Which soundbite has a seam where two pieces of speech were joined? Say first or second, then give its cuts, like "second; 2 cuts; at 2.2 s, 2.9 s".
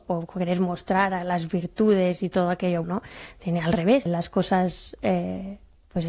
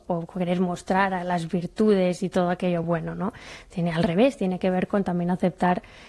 first; 2 cuts; at 2.8 s, 4.1 s